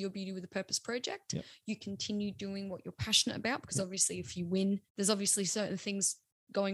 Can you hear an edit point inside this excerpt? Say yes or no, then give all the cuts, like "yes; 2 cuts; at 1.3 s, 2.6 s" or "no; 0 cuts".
yes; 1 cut; at 4.9 s